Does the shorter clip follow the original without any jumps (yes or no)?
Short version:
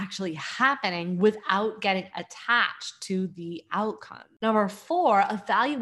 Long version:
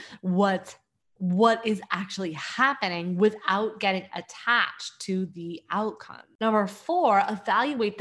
yes